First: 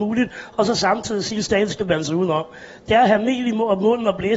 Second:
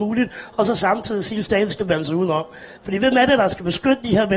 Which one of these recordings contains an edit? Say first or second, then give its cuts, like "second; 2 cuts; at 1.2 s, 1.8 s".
second; 1 cut; at 2.8 s